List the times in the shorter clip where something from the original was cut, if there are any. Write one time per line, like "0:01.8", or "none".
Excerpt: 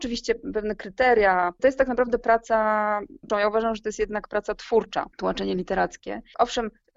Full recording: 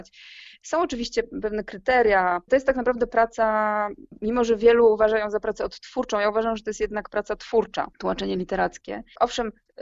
0:03.3